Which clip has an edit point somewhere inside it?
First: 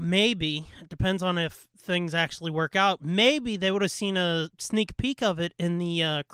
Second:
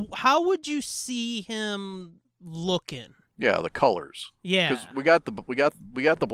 second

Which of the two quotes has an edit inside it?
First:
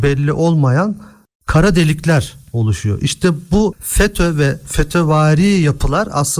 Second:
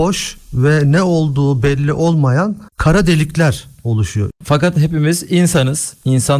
second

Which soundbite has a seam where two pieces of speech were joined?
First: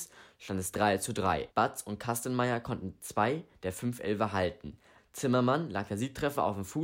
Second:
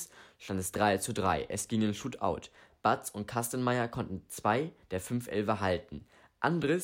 first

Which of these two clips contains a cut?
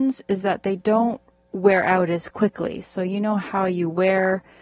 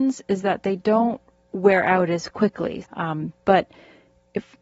second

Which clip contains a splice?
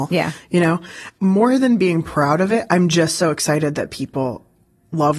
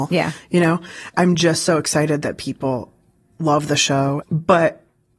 second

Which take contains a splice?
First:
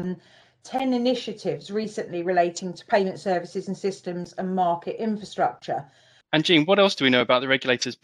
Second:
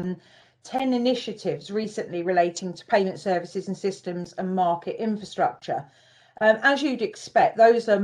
first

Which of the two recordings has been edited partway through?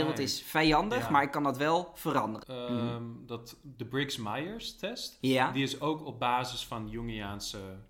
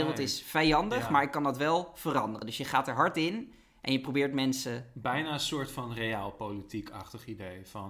first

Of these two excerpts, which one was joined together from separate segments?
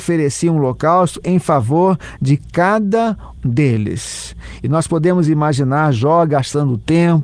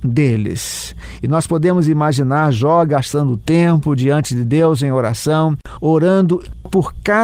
first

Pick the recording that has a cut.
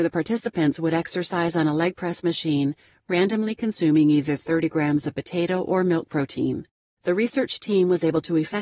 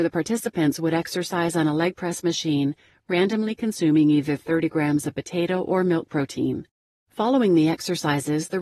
first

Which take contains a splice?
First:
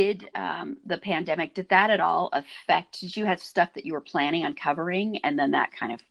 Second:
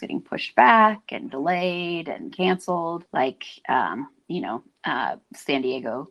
second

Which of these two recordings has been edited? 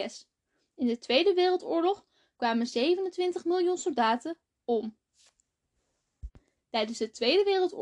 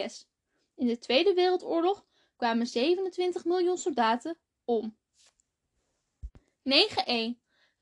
first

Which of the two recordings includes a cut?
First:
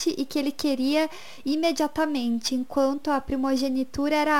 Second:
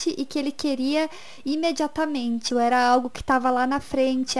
second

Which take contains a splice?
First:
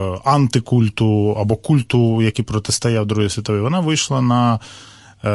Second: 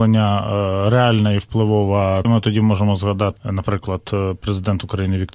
second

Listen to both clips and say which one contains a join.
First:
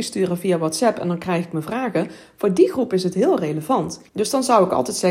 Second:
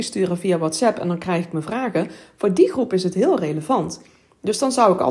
first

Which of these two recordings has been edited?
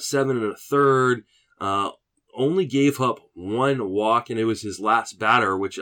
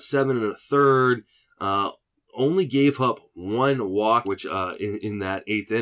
second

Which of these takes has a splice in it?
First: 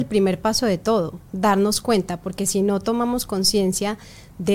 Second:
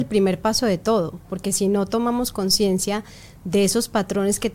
second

